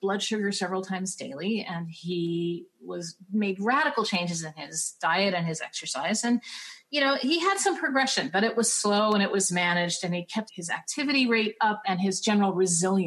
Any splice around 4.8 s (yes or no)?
no